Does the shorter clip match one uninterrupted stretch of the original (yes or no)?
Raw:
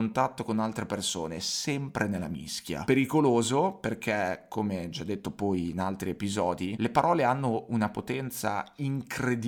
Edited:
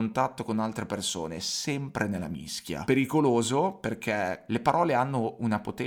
no